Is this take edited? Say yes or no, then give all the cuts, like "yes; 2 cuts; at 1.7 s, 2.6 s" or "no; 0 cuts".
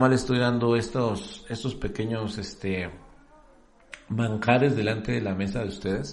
no; 0 cuts